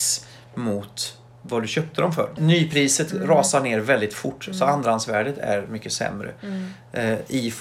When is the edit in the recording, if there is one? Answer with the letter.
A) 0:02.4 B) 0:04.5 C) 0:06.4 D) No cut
A